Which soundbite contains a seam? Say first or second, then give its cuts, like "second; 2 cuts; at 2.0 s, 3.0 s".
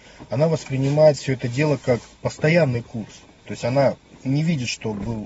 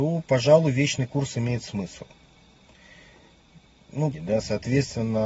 second; 1 cut; at 4.1 s